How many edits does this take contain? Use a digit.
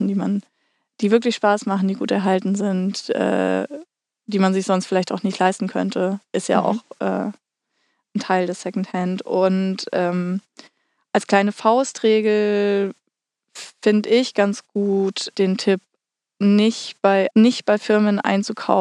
2